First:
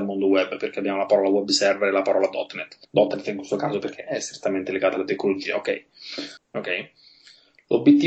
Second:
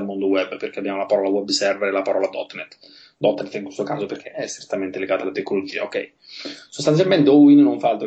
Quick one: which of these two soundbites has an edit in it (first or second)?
first